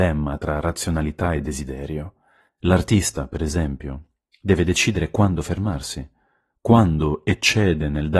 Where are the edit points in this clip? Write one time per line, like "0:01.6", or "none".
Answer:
none